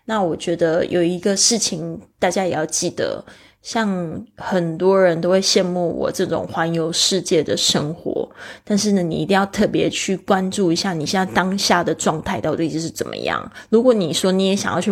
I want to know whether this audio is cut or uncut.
uncut